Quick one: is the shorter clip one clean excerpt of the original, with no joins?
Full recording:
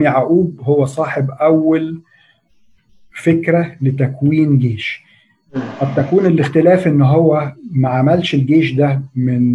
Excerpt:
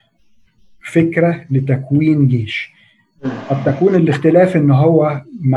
yes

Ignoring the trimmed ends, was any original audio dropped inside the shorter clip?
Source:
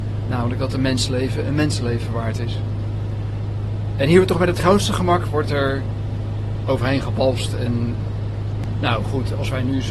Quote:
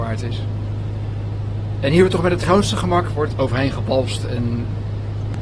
yes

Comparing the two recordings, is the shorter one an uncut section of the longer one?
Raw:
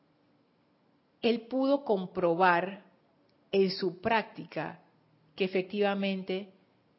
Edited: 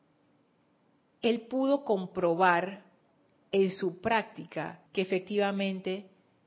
no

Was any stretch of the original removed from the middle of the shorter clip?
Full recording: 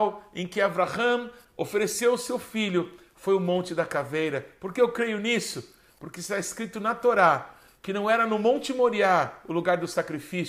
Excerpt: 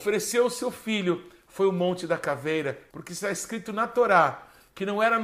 yes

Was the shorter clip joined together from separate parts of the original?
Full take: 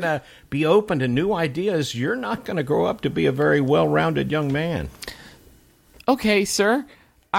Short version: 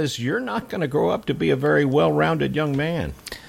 no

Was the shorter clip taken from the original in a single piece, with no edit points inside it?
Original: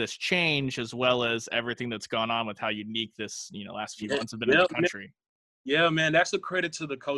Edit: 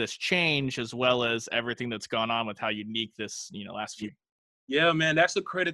no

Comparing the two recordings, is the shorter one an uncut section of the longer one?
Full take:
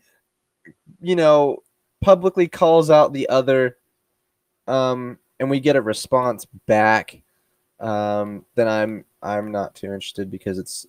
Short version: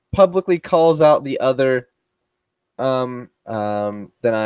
no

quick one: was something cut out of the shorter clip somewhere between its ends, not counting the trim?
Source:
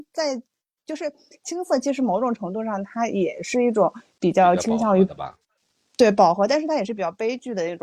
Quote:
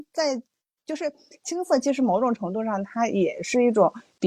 no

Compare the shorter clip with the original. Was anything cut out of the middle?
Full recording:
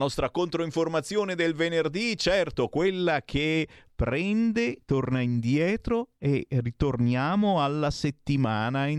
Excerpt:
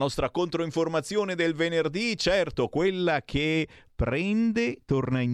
no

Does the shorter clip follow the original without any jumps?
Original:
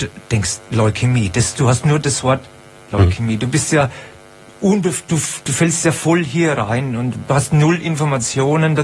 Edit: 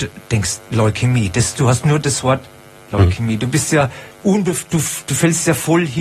no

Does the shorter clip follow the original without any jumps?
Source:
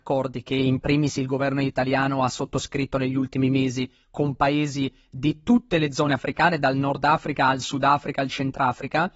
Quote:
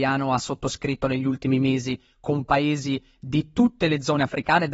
yes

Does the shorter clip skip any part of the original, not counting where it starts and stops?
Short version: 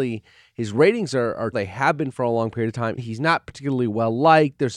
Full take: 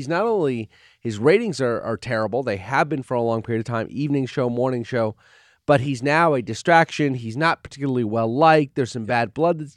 yes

